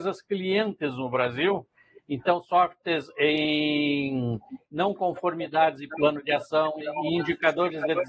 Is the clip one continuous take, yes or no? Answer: no